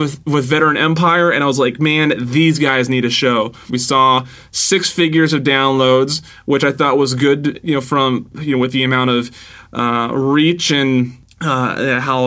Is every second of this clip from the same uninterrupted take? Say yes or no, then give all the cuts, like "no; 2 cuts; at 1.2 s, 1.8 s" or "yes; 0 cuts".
no; 1 cut; at 3.7 s